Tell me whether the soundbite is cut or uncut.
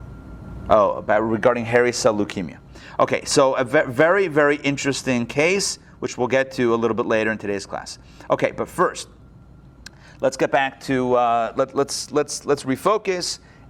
uncut